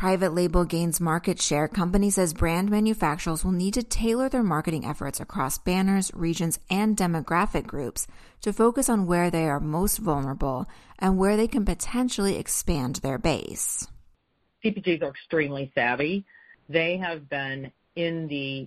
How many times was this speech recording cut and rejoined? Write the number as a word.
zero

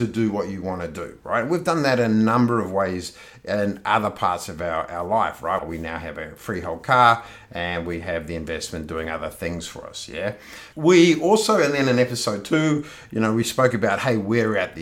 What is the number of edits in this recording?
two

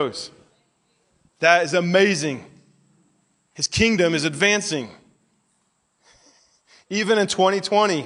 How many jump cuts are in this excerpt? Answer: zero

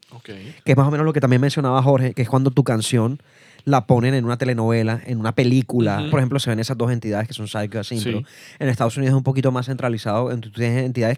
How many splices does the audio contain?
one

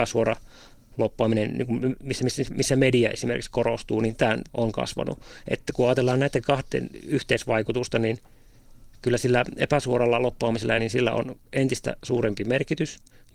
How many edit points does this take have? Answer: two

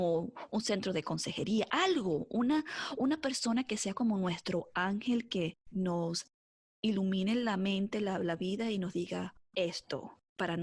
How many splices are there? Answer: two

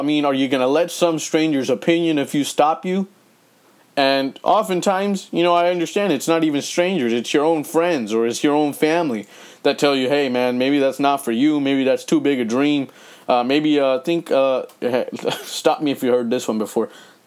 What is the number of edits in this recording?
zero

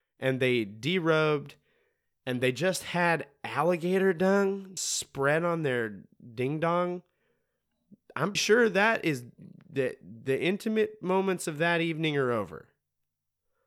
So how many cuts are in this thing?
two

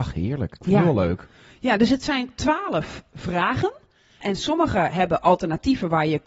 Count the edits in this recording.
zero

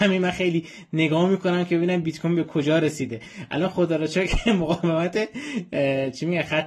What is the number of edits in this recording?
zero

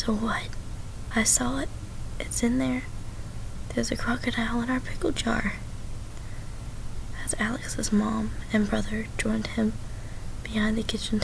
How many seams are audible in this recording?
one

